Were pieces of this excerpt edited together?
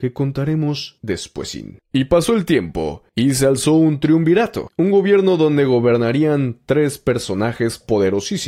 yes; 1 cut; at 1.8 s

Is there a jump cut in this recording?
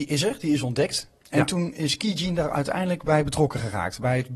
no; 0 cuts

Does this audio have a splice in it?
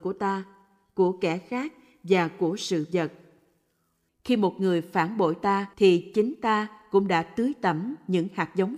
yes; 2 cuts; at 4.1 s, 5.7 s

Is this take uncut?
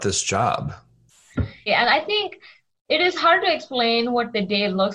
no; 1 cut; at 1.7 s

